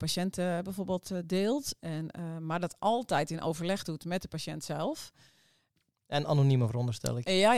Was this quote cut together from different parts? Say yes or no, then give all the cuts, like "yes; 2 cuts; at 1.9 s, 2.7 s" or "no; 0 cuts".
no; 0 cuts